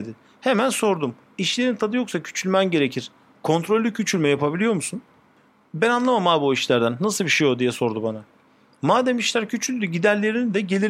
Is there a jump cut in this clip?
no; 0 cuts

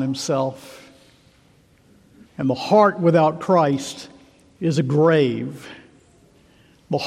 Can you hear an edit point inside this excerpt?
yes; 1 cut; at 2.2 s

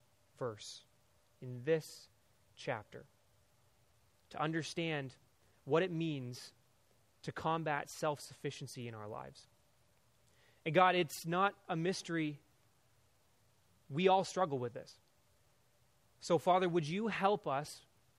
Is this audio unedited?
yes; 0 cuts

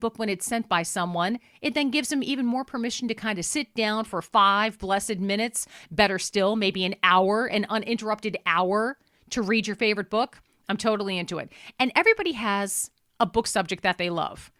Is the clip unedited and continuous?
yes; 0 cuts

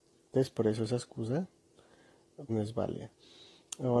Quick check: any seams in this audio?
yes; 1 cut; at 2.5 s

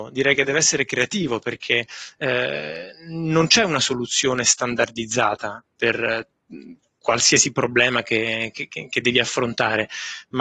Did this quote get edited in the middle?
yes; 1 cut; at 8.7 s

